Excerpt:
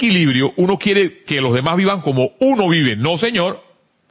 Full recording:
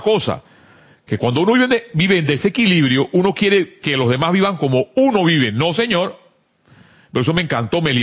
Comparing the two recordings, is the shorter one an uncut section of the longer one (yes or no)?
yes